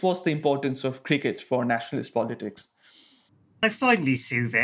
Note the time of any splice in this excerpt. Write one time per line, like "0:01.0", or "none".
none